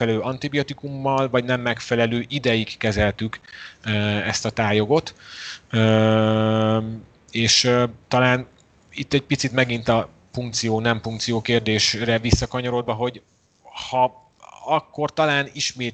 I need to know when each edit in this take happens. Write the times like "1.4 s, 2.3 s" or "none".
none